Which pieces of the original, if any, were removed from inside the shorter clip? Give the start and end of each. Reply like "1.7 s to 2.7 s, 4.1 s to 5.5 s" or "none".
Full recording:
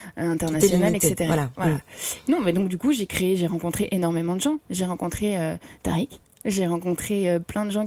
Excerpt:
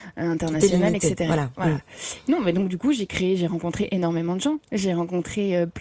4.6 s to 6.4 s